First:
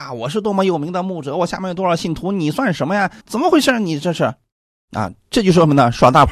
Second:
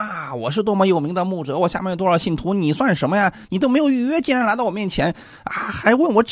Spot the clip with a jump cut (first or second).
first